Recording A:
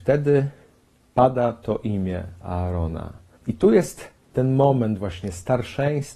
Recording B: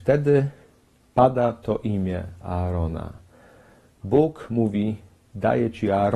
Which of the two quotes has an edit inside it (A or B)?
A